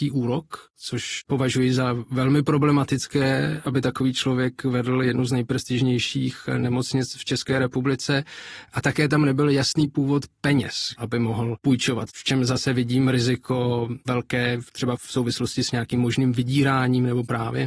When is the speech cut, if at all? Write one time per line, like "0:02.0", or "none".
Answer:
0:11.0